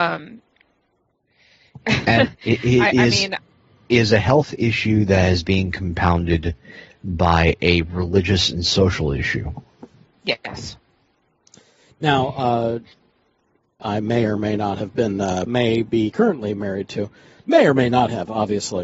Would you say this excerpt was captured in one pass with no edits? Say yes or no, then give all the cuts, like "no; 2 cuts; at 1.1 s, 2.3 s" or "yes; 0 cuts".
no; 2 cuts; at 13.8 s, 15.5 s